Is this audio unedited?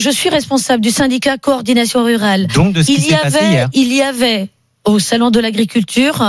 yes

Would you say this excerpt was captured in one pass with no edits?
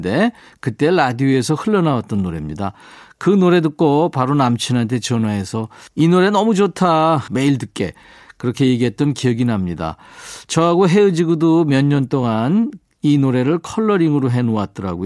no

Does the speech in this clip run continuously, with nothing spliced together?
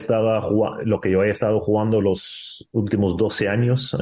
yes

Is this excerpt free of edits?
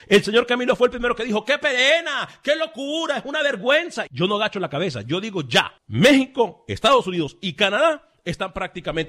no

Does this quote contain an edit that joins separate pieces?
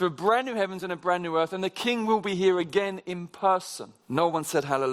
yes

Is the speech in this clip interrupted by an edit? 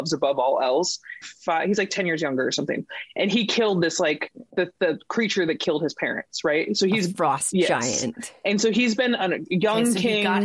yes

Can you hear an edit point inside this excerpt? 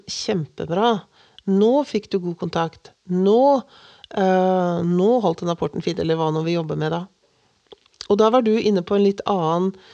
no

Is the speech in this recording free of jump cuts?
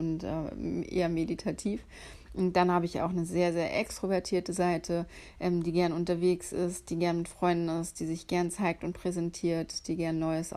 yes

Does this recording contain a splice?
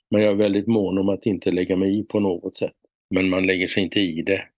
yes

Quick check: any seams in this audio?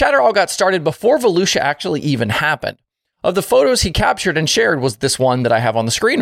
yes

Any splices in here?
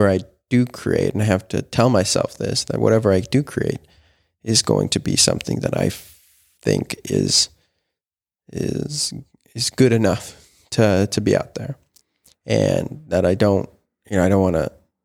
no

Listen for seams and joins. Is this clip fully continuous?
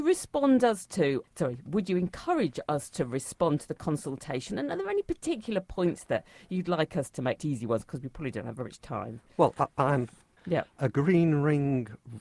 no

